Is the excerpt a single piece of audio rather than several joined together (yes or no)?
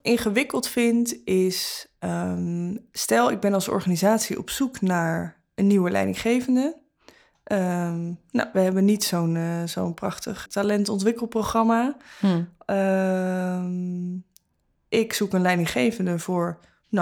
no